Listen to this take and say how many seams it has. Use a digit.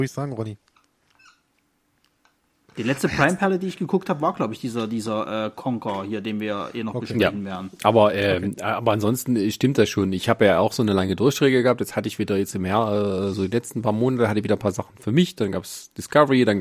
0